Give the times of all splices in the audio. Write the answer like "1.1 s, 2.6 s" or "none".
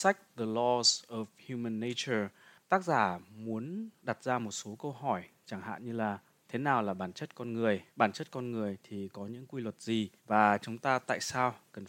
7.9 s, 10.2 s